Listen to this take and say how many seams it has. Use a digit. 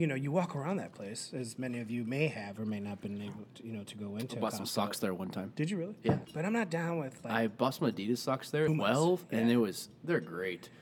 2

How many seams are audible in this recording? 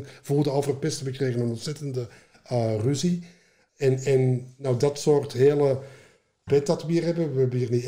2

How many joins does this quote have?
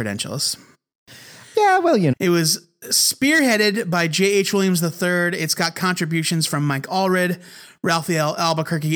1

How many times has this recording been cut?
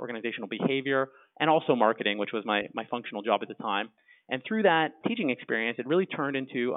1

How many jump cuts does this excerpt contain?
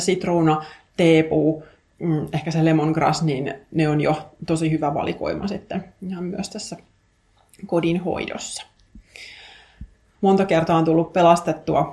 1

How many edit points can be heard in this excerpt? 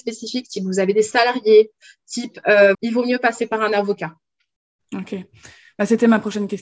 1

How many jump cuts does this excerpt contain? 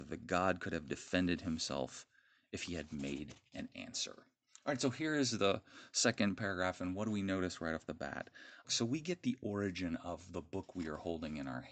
1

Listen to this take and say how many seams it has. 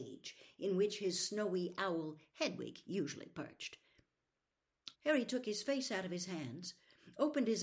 1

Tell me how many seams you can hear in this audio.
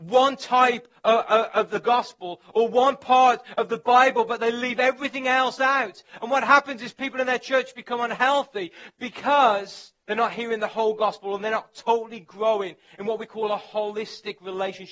1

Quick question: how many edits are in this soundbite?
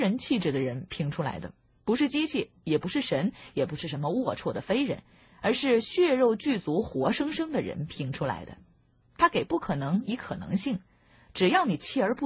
1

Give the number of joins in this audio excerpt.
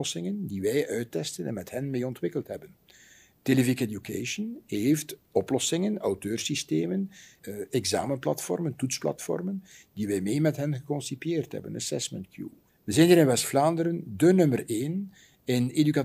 2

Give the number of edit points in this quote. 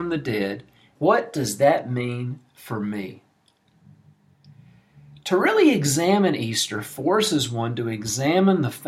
1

